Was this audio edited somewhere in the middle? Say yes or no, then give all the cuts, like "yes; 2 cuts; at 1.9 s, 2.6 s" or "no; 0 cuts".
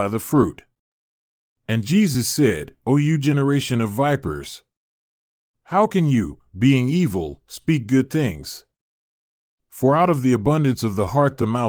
no; 0 cuts